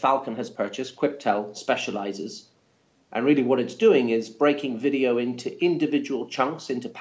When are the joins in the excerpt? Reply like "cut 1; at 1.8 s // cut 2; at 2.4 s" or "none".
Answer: cut 1; at 2.9 s